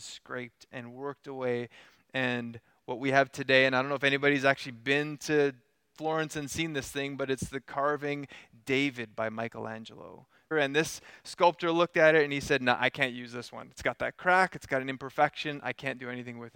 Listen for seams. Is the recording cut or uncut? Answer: cut